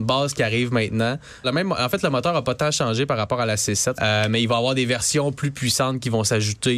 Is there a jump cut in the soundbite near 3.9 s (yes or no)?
yes